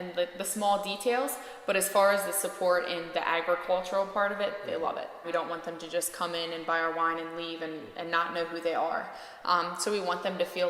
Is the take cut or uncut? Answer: cut